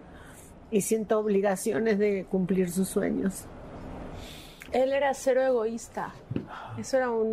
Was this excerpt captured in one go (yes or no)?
no